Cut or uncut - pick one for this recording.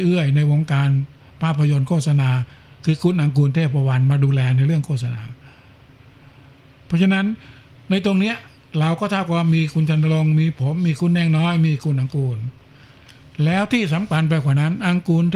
uncut